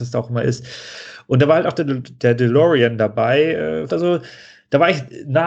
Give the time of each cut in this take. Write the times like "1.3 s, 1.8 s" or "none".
3.9 s